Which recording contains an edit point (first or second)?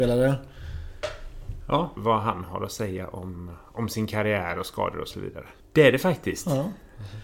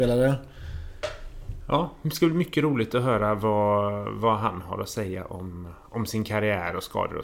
first